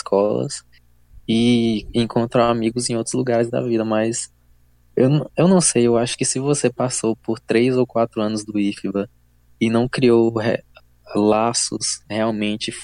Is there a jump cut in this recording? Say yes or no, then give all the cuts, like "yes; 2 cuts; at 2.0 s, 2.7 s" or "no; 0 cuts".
no; 0 cuts